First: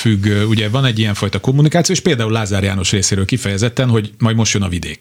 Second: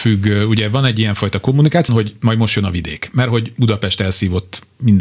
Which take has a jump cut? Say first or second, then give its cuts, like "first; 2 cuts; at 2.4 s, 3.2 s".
second; 1 cut; at 1.9 s